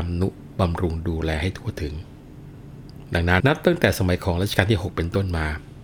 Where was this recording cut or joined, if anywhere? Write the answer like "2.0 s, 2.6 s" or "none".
3.4 s